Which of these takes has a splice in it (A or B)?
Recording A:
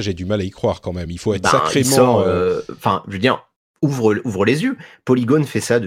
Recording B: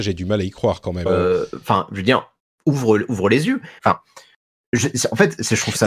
B